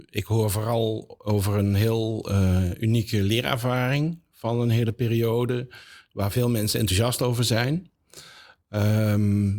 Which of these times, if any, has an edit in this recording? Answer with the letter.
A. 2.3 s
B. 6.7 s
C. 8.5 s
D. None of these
D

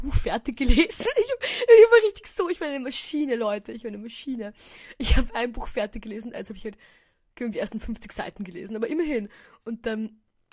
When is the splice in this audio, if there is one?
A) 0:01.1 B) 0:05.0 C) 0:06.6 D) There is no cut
D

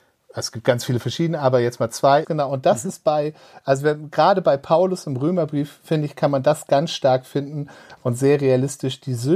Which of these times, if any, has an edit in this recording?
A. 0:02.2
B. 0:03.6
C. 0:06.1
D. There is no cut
A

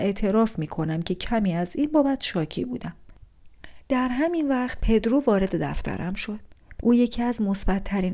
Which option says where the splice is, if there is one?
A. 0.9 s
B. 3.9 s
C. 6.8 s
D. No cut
C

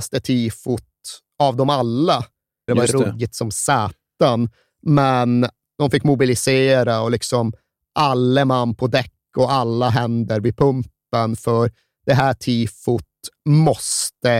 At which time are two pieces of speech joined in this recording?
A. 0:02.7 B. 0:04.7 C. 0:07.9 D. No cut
A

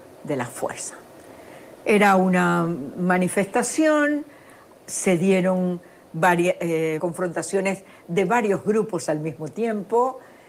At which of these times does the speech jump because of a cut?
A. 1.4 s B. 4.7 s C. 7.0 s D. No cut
C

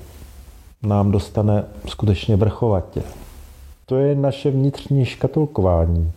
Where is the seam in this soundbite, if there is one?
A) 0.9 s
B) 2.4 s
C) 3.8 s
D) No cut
C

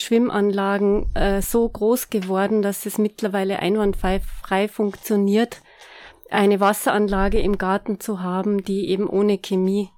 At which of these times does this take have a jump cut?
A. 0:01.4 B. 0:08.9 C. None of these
C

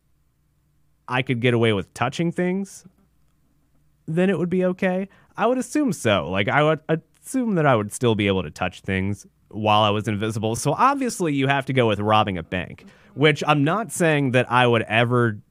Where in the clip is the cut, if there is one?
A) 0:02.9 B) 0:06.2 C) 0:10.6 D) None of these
D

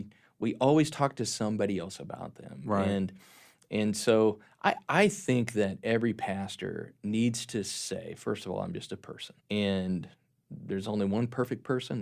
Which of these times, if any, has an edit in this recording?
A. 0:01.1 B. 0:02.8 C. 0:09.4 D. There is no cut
C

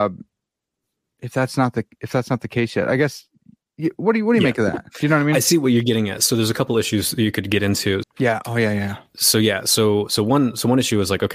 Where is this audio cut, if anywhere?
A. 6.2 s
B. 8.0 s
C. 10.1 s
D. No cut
B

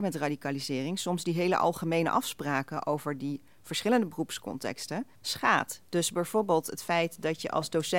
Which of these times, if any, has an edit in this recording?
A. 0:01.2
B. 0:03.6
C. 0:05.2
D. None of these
C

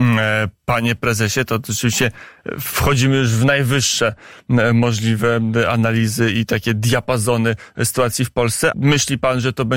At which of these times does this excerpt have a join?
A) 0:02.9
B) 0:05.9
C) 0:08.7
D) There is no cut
C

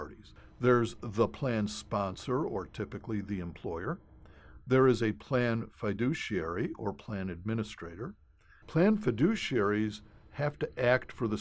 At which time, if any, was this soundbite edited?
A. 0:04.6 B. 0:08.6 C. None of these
B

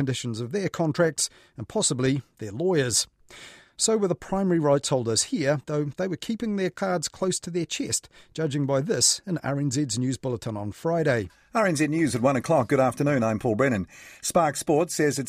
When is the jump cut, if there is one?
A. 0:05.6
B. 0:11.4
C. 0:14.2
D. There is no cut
D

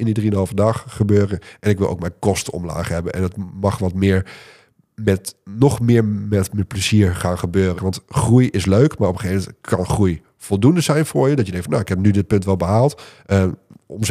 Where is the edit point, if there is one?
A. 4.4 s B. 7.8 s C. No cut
B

